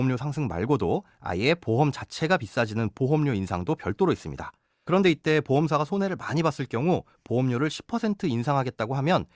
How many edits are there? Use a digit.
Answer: 1